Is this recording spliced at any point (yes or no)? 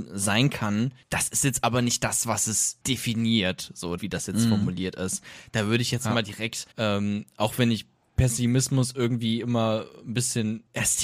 yes